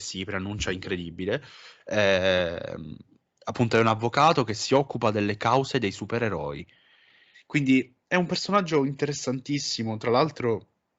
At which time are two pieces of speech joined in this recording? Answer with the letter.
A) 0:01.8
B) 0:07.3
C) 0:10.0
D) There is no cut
B